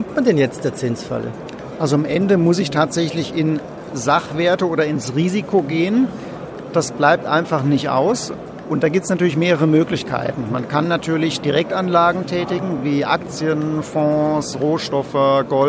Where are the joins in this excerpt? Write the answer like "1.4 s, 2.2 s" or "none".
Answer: none

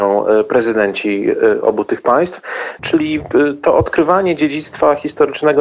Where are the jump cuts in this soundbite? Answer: 2.8 s

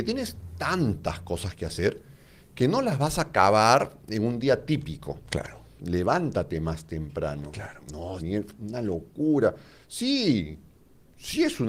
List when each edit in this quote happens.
5.8 s, 8.2 s

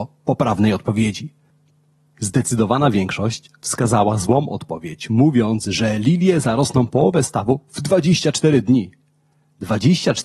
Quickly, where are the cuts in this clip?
none

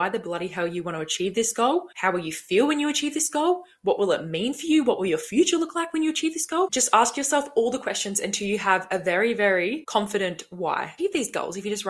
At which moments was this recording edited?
11.0 s

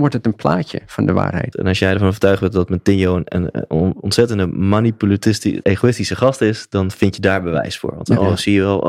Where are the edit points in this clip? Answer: 1.5 s, 5.6 s

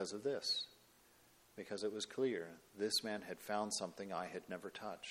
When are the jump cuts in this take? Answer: none

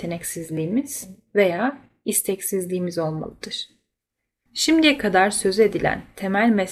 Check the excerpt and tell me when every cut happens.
4.5 s

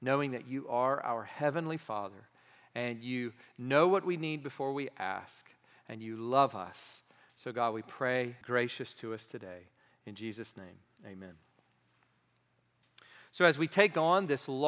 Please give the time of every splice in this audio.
8.4 s

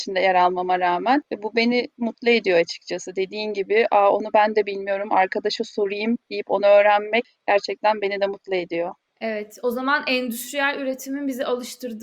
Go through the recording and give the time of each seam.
none

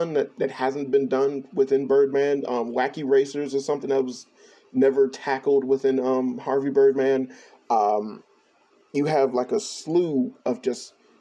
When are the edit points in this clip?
none

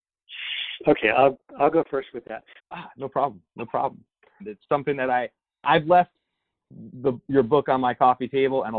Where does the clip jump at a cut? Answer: 2.6 s, 4.4 s

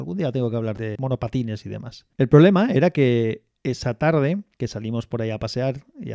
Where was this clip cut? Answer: 2.1 s, 4.5 s

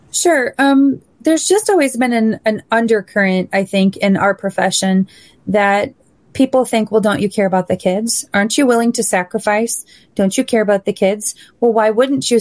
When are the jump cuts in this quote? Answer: none

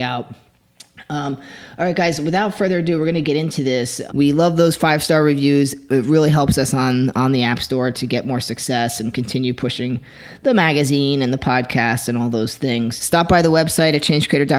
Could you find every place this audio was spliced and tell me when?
4.1 s, 13.0 s

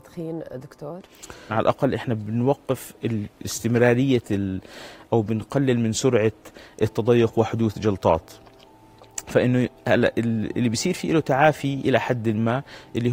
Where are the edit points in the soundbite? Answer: 1.5 s

